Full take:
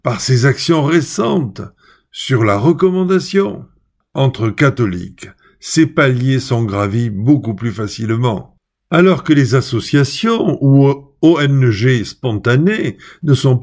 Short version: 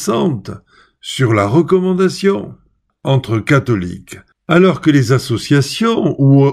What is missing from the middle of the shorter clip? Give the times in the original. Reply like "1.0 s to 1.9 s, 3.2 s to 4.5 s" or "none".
5.4 s to 8.7 s